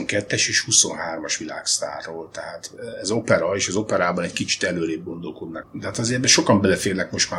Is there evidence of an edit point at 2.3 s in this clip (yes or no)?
no